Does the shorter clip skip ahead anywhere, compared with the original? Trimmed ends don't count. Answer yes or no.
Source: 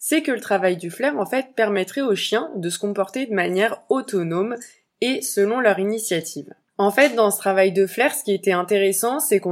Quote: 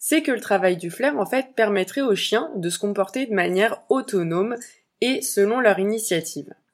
no